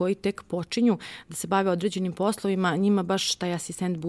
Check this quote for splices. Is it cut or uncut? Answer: uncut